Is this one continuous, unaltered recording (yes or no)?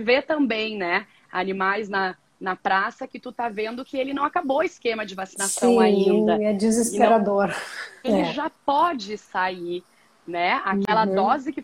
no